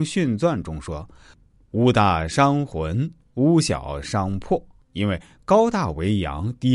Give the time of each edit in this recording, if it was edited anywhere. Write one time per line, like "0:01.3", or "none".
0:04.8